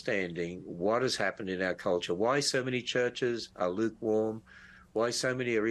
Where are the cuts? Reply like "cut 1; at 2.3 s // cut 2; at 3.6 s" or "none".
none